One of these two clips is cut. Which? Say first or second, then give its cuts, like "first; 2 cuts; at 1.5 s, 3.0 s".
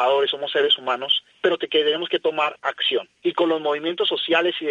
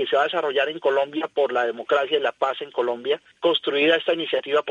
first; 1 cut; at 3.2 s